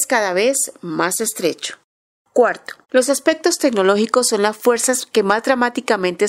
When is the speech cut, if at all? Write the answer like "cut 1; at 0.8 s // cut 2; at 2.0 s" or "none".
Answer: cut 1; at 2.8 s